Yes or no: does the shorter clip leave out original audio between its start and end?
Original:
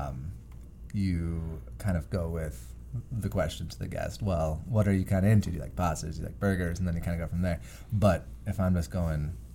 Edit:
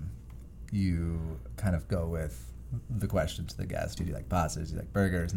yes